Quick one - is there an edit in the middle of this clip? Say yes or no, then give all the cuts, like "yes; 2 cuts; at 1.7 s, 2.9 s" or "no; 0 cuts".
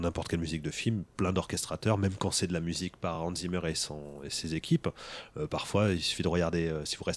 no; 0 cuts